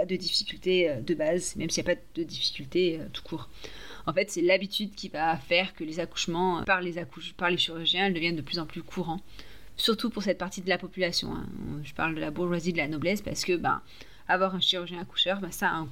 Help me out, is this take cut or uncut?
cut